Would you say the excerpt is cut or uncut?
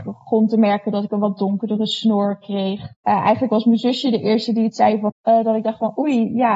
cut